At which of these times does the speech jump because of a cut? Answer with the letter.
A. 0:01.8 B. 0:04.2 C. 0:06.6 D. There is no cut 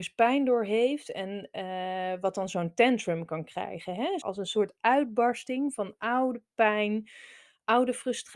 B